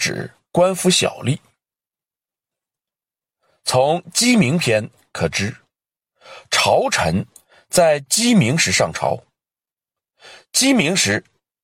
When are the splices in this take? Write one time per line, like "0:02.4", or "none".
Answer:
none